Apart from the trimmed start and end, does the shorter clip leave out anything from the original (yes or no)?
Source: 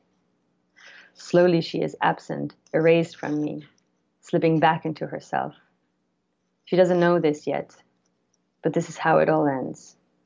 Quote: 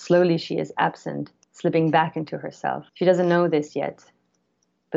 yes